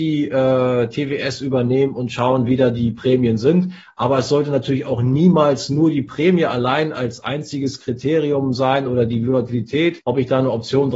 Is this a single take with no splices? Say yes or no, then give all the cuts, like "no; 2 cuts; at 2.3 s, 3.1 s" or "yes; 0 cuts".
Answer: yes; 0 cuts